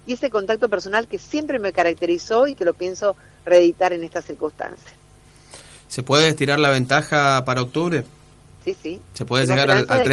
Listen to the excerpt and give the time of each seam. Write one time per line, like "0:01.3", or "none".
0:08.4